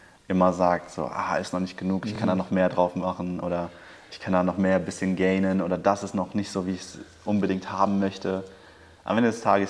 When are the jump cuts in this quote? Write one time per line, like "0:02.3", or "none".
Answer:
none

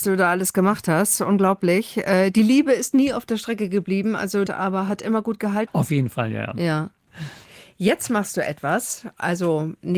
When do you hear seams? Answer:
0:04.5
0:05.7

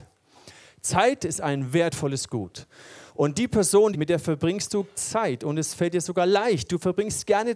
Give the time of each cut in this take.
0:03.9

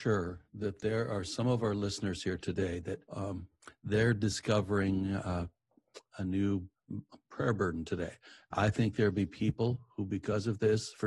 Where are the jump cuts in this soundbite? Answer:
0:03.1

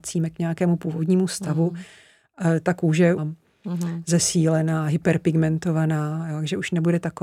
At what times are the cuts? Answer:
0:03.2

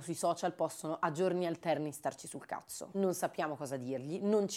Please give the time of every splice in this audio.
0:02.9

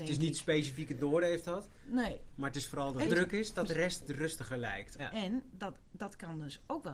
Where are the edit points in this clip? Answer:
0:03.0
0:05.0

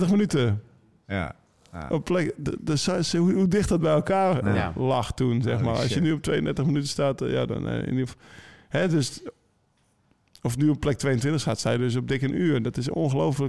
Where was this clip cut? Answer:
none

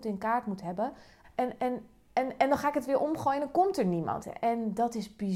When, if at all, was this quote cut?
0:01.2
0:04.2

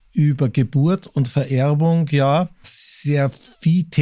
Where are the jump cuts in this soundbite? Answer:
0:02.6

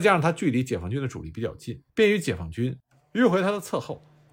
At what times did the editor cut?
0:01.9

